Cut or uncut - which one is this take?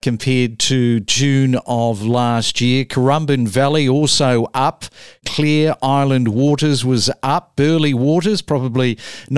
uncut